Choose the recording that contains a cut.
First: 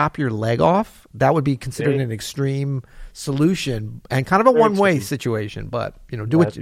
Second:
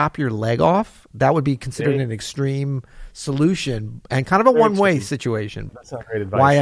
second; 1 cut; at 5.7 s

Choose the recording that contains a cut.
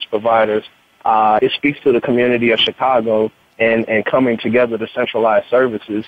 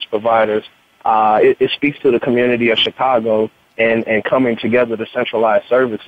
first; 1 cut; at 1.4 s

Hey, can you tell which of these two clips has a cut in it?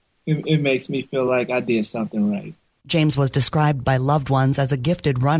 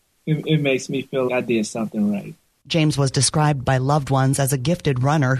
second; 1 cut; at 1.3 s

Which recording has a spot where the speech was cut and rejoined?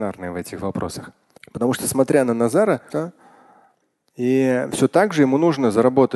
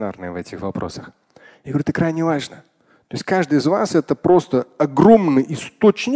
first; 2 cuts; at 1.4 s, 2.9 s

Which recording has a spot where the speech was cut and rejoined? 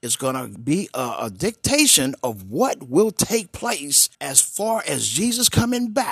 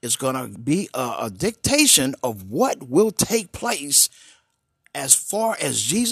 first; 1 cut; at 4.1 s

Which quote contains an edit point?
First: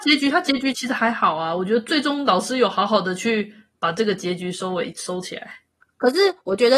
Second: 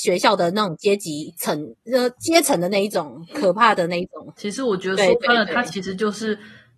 second; 1 cut; at 4.4 s

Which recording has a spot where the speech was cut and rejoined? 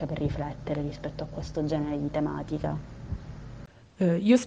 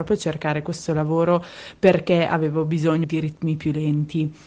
second; 1 cut; at 3.0 s

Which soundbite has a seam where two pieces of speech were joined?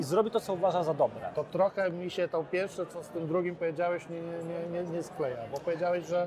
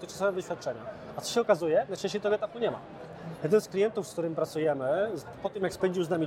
second; 1 cut; at 5.4 s

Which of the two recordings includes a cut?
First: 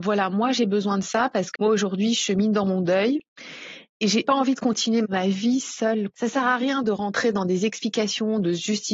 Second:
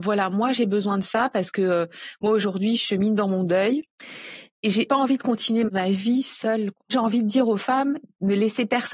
first; 2 cuts; at 1.6 s, 6.1 s

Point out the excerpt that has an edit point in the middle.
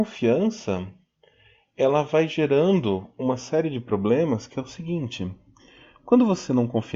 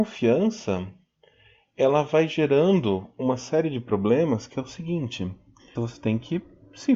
second; 1 cut; at 5.7 s

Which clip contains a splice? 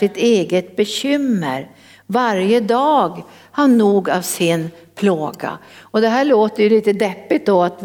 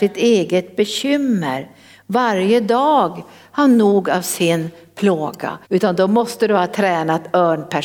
second; 1 cut; at 5.6 s

